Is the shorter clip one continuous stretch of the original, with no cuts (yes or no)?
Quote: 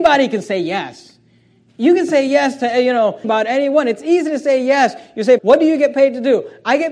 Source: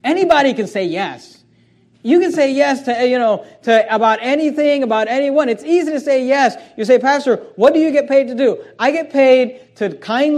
no